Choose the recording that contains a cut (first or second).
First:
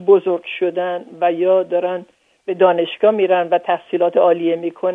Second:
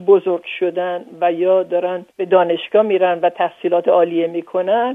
second